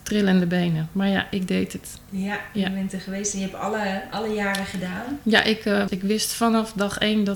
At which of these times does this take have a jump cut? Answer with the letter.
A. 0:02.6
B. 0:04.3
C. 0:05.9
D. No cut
C